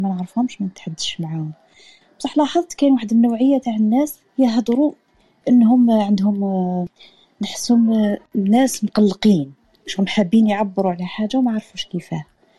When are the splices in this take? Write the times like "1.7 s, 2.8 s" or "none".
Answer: 4.3 s